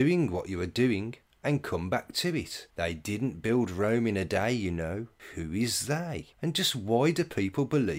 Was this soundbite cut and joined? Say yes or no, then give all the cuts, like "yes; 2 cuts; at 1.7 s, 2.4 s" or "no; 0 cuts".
no; 0 cuts